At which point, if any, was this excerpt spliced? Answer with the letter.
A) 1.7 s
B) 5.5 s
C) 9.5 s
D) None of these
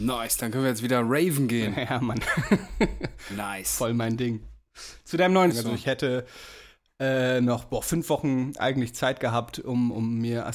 B